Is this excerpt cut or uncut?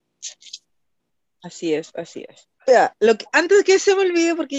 cut